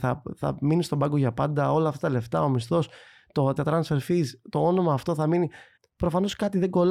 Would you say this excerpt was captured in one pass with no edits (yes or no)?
no